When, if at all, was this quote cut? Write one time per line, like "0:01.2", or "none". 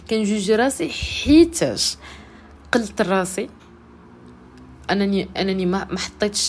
0:05.4